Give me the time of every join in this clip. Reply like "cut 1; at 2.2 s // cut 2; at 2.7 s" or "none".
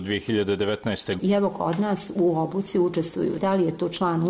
cut 1; at 1.2 s // cut 2; at 3.4 s